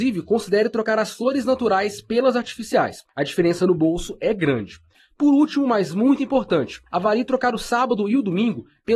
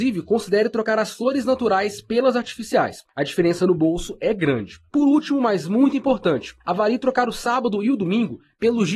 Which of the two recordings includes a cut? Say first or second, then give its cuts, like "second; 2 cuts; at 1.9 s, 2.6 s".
second; 1 cut; at 4.9 s